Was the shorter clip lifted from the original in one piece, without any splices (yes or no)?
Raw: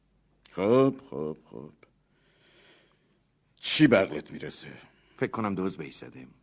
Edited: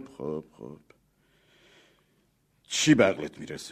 yes